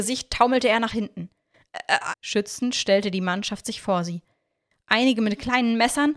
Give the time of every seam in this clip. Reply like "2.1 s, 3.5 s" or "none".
2.1 s